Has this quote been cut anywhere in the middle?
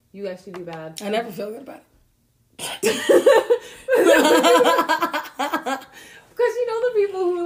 no; 0 cuts

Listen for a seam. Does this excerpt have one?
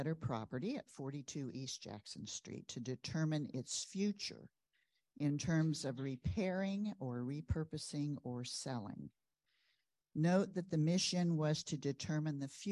no; 0 cuts

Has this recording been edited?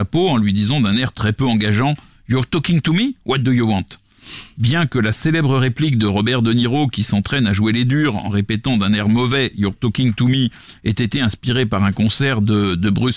no; 0 cuts

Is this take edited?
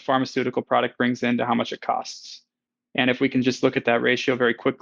no; 0 cuts

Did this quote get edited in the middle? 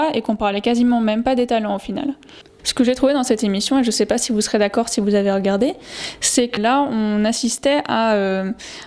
yes; 2 cuts; at 2.6 s, 6.6 s

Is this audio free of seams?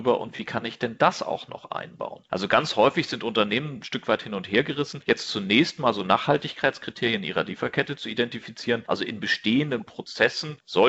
yes; 0 cuts

